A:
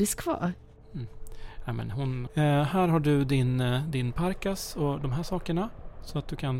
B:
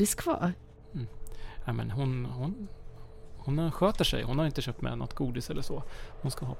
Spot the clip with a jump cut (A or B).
A